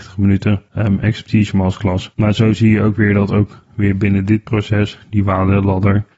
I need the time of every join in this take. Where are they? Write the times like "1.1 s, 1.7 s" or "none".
2.1 s

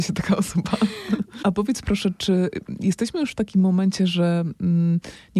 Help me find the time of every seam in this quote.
1.4 s

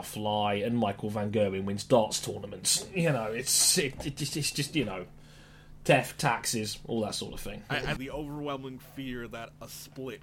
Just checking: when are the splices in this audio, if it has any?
8.0 s

